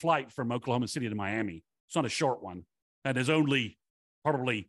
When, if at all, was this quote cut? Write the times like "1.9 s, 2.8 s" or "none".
none